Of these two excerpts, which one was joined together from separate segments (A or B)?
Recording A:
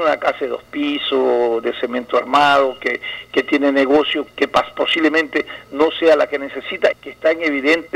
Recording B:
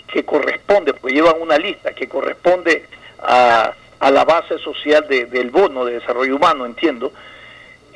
A